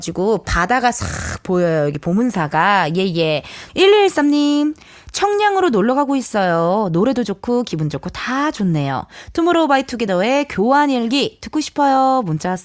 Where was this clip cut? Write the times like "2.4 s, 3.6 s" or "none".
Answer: 3.7 s